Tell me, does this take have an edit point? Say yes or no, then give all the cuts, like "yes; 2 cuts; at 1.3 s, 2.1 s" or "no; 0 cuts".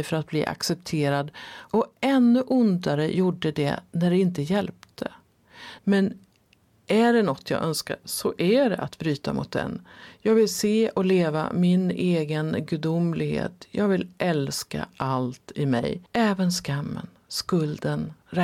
yes; 2 cuts; at 5.8 s, 16.1 s